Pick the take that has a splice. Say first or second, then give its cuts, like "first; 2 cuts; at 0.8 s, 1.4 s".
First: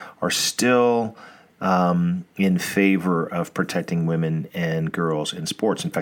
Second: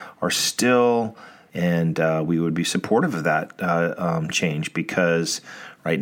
second; 1 cut; at 1.5 s